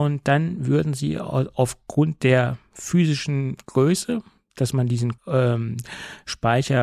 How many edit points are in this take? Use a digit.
1